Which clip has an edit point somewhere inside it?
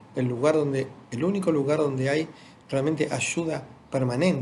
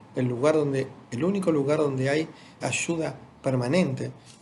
second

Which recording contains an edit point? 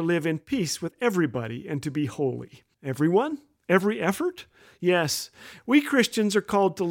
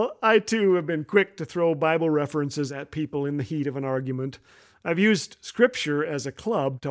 first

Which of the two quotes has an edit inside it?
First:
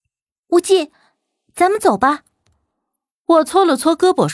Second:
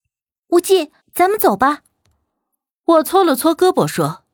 second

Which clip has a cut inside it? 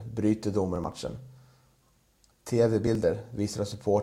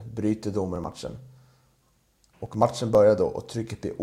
second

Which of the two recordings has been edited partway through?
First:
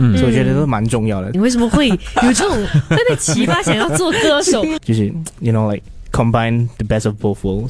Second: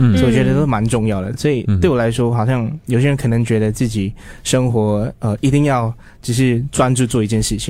first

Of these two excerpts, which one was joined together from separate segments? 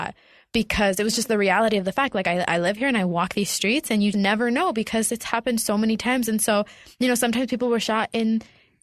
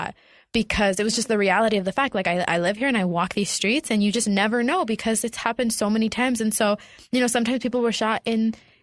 first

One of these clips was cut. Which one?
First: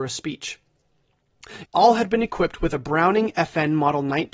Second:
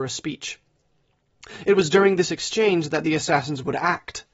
first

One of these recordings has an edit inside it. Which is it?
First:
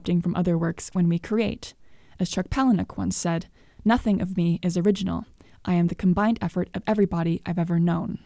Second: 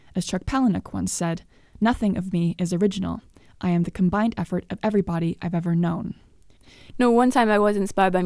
second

